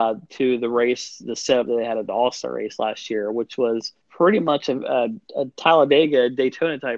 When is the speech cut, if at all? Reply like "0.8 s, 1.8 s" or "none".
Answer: 4.0 s, 5.3 s